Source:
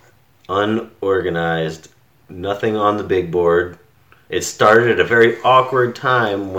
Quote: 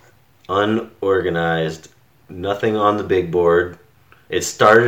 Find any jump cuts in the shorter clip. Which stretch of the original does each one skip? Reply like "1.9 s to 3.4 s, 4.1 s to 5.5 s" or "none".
none